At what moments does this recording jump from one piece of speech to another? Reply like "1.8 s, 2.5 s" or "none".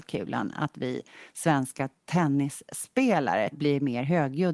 3.5 s